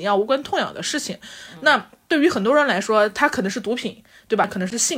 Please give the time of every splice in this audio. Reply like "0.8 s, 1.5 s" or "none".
none